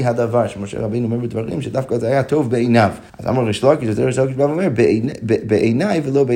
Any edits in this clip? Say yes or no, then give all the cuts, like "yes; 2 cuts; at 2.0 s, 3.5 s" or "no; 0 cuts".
yes; 1 cut; at 3.1 s